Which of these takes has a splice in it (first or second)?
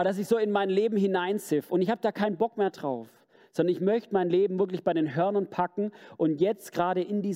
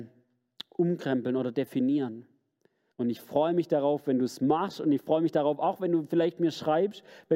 second